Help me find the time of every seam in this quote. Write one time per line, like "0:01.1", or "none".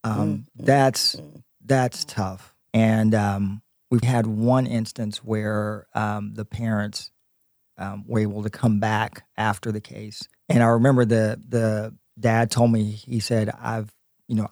0:02.6
0:04.0
0:10.4